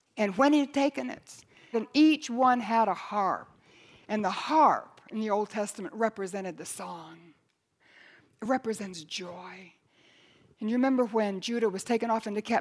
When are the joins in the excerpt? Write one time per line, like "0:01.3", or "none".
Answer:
0:01.7